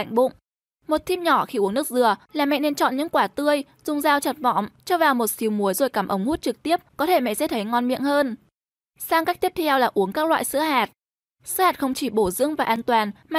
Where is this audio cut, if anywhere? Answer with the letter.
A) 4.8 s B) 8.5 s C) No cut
C